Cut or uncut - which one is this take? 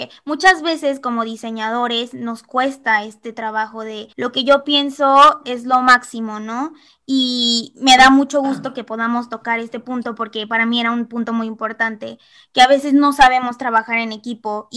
cut